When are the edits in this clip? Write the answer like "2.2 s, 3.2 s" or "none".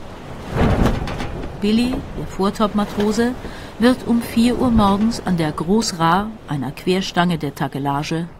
none